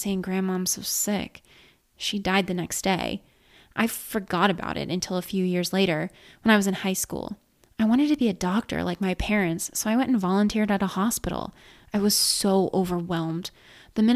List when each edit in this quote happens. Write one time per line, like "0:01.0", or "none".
none

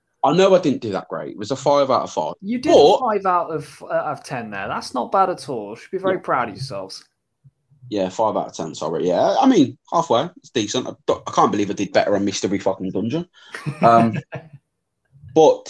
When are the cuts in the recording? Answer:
none

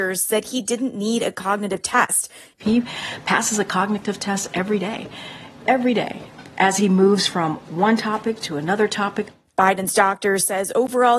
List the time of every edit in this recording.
0:02.5

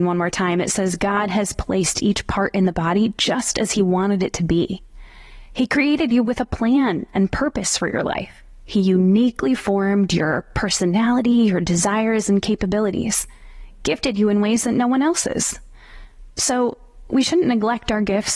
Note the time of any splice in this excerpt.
none

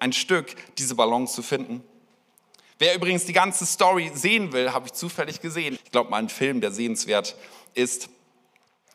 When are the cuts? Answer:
0:05.8

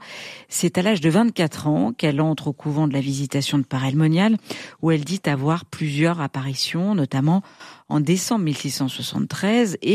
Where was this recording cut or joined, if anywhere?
none

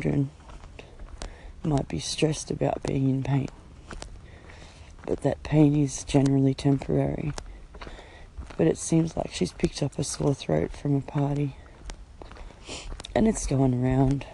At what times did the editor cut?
none

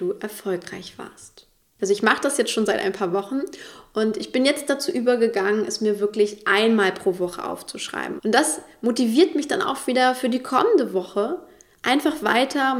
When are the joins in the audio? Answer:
0:08.2

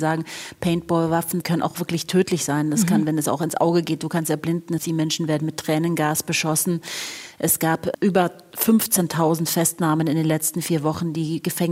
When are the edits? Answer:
none

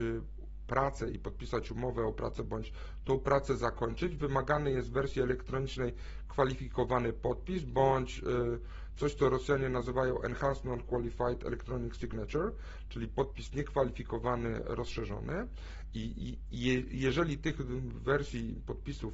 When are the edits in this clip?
none

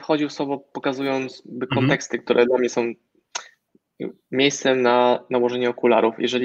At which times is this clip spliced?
none

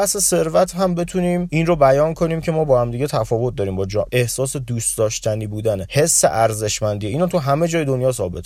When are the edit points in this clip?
0:04.1

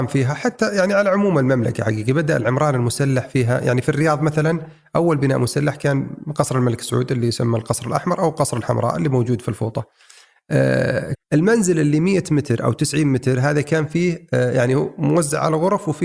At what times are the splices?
0:11.1

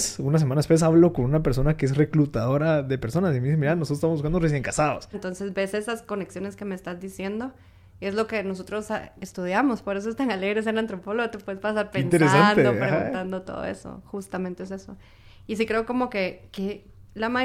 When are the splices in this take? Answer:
0:05.1

